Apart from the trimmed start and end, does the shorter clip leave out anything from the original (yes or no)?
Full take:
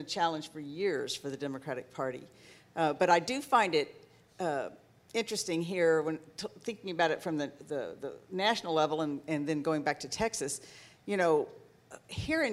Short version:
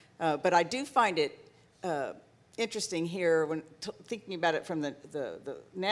no